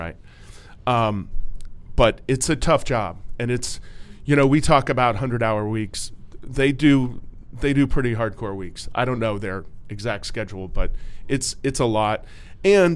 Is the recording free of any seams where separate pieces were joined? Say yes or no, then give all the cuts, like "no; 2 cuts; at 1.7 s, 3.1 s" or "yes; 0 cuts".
yes; 0 cuts